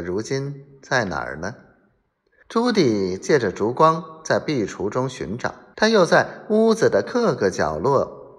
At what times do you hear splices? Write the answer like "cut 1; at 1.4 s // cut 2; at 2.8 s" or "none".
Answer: cut 1; at 2.4 s // cut 2; at 5.7 s